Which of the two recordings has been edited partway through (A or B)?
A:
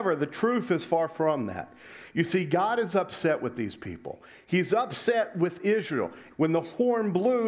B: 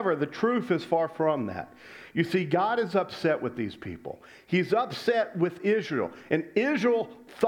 A